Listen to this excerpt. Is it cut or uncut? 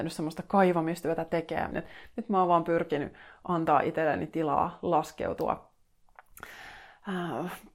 cut